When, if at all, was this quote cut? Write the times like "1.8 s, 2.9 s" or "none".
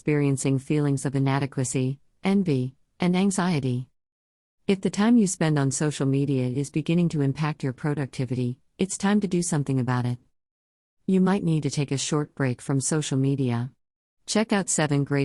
none